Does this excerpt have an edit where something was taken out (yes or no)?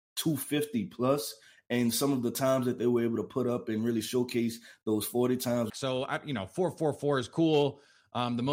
yes